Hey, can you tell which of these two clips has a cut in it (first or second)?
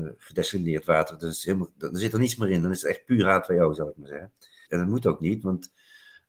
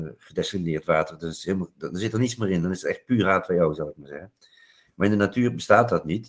first